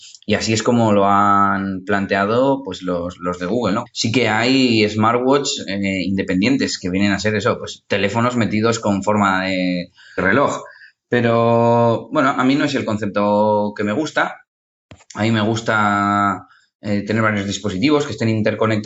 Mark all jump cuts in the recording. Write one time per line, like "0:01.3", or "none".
0:03.9
0:10.2